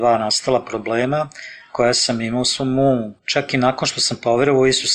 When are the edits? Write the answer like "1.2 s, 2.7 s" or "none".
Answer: 3.2 s